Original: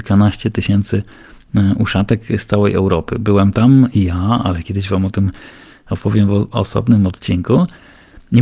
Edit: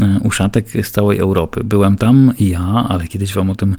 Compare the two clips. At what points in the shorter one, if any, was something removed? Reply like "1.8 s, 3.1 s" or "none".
none